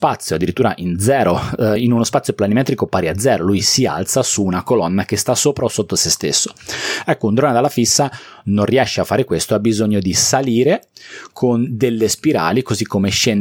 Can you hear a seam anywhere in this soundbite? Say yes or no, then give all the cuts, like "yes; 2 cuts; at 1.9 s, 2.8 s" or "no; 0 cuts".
no; 0 cuts